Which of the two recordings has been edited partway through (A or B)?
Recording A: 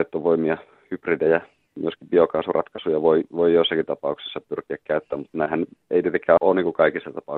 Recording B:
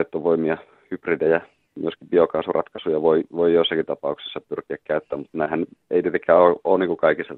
A